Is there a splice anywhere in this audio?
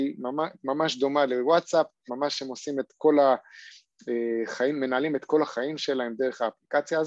yes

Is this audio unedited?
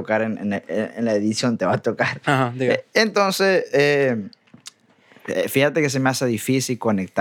no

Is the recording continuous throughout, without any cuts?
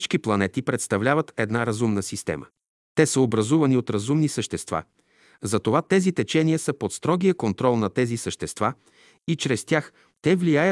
yes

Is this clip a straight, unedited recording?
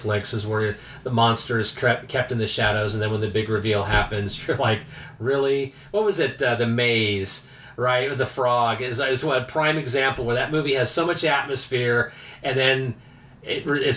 yes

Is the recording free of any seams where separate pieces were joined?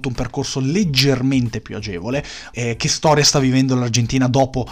no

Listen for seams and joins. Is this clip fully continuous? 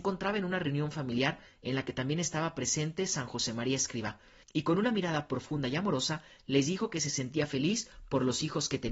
yes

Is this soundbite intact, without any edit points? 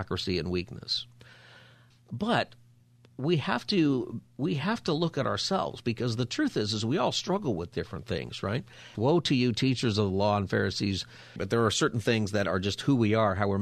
no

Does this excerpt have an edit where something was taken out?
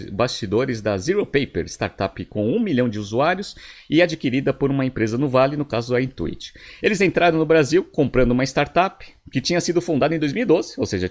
no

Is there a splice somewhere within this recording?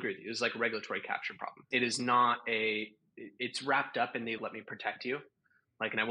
yes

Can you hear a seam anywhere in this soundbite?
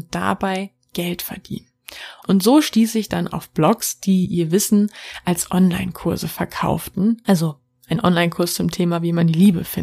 yes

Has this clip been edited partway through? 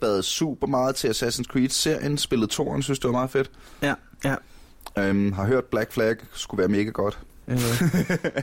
yes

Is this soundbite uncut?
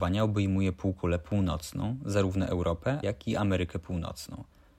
no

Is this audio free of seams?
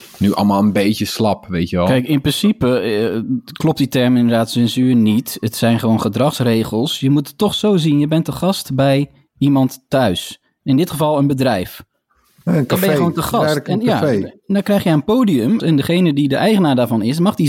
no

